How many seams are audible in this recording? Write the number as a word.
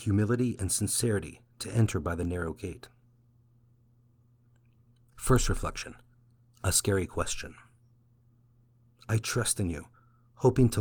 one